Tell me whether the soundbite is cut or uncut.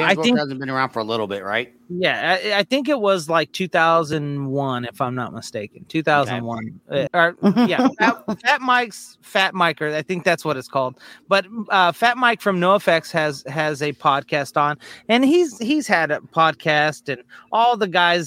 cut